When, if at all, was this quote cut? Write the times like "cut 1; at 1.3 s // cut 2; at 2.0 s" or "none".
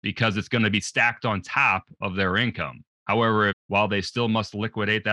cut 1; at 3.5 s

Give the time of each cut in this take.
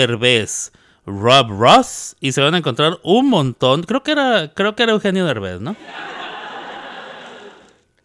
none

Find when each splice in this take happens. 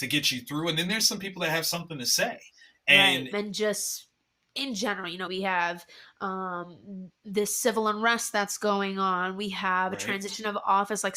cut 1; at 3.3 s // cut 2; at 5.3 s

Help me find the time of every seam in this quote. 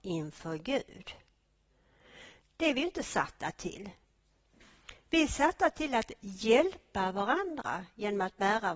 cut 1; at 2.4 s

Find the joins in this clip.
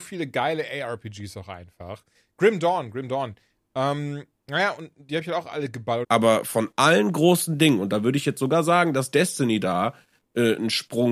cut 1; at 6.0 s

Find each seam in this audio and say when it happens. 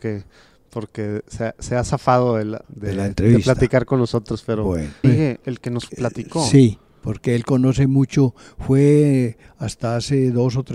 cut 1; at 2.6 s // cut 2; at 5.0 s

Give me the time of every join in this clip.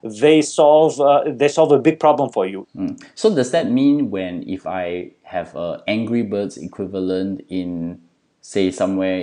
cut 1; at 2.6 s

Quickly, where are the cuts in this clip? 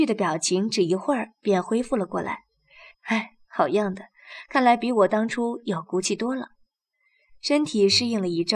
cut 1; at 2.9 s

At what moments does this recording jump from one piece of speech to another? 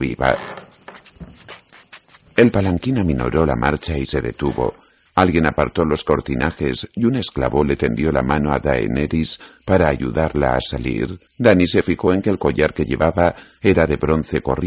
cut 1; at 11.3 s

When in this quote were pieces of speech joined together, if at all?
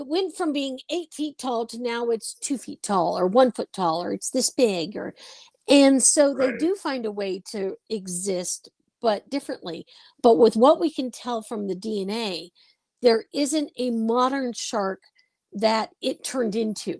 none

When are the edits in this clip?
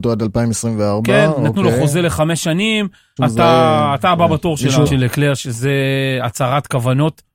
cut 1; at 3.2 s // cut 2; at 4.9 s

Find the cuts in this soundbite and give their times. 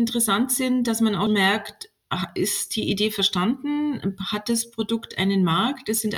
cut 1; at 1.3 s

